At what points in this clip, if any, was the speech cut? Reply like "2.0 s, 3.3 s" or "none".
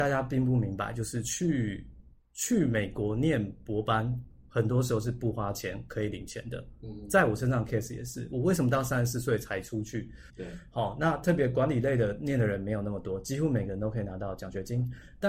10.3 s